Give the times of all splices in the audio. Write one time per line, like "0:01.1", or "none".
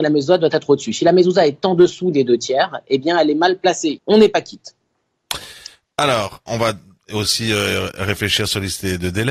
0:04.0
0:06.5